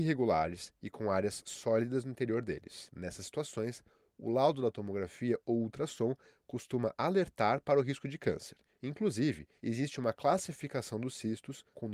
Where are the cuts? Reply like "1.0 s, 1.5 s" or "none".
none